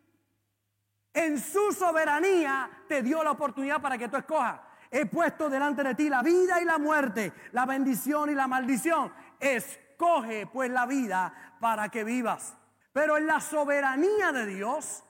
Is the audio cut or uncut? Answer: cut